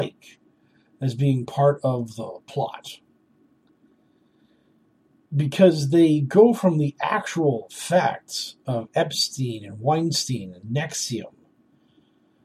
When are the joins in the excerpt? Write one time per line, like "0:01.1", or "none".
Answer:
none